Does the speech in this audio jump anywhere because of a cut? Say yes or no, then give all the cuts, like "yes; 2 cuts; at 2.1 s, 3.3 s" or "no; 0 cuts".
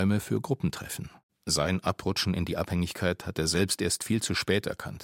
yes; 1 cut; at 1.3 s